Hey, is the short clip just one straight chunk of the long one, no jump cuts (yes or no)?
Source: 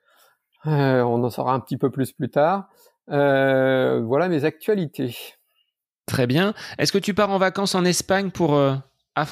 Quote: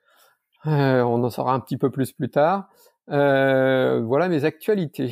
yes